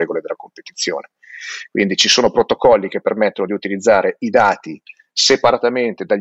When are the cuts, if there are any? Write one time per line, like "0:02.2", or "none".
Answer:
none